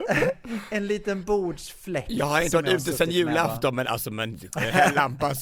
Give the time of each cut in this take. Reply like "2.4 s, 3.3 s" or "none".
none